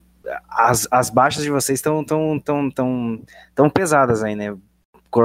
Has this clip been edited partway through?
no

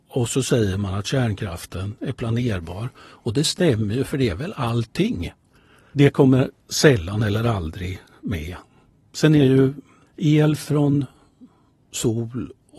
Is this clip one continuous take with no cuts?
no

